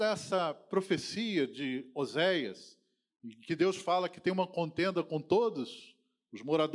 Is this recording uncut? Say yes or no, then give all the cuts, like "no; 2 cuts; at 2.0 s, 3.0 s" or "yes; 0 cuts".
yes; 0 cuts